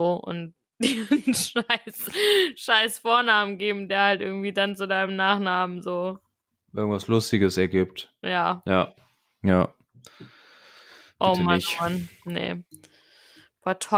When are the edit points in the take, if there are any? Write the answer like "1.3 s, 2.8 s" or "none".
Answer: none